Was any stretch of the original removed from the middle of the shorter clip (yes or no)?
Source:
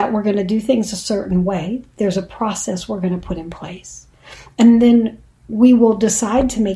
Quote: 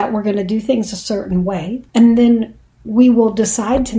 yes